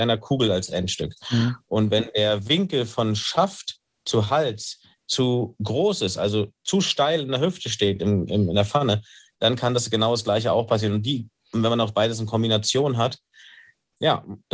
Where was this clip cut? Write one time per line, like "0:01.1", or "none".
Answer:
none